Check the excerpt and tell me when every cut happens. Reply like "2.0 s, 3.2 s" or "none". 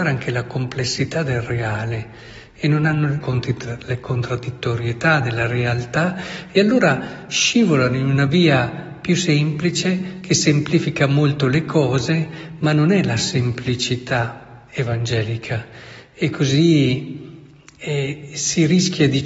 3.2 s